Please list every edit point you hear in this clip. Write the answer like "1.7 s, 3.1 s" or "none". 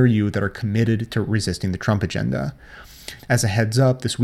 3.2 s